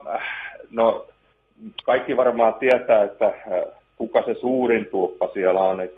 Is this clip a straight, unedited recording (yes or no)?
yes